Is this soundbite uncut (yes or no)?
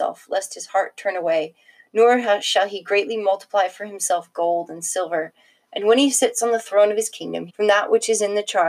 no